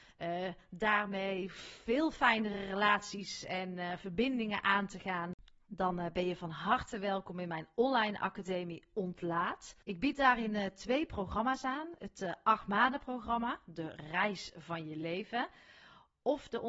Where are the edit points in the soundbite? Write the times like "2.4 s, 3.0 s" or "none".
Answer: 9.8 s